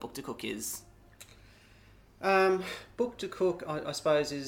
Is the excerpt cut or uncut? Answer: uncut